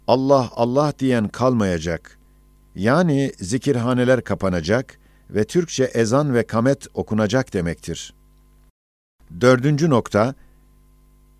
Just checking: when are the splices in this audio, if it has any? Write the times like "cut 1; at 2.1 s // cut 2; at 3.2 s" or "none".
none